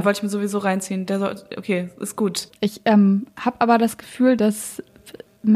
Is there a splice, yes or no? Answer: yes